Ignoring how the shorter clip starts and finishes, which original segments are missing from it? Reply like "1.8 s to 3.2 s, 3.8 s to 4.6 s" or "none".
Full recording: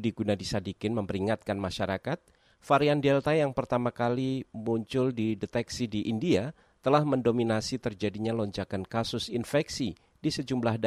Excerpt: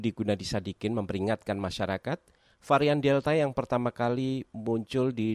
none